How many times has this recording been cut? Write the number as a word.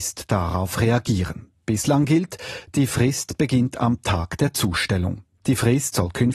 one